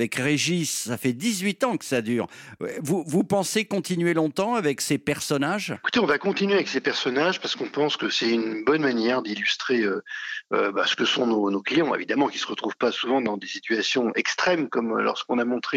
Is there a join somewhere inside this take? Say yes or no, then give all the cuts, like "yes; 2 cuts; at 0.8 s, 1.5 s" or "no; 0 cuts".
no; 0 cuts